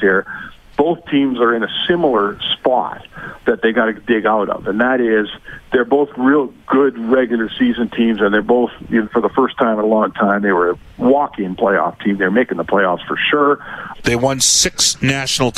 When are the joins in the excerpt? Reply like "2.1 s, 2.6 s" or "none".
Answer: 9.1 s, 14.0 s